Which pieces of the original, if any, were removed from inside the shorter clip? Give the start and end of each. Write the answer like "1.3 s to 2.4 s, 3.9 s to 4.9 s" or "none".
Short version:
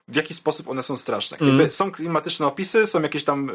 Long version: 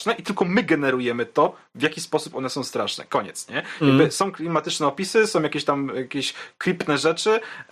3.1 s to 3.8 s